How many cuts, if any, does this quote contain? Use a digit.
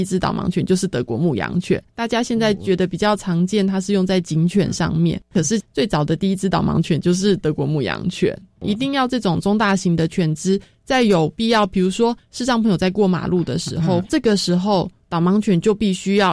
1